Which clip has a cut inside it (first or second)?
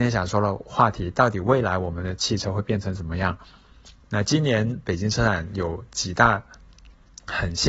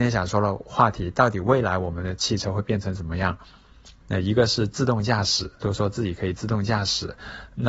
second